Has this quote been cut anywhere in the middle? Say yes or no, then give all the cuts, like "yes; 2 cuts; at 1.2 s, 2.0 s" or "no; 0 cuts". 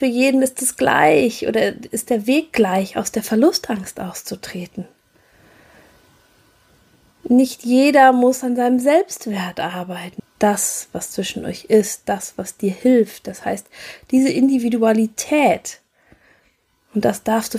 yes; 1 cut; at 10.2 s